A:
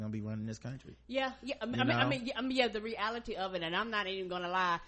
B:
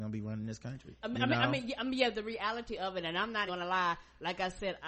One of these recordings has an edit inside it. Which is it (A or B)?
B